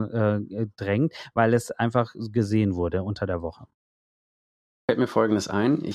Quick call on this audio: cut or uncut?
uncut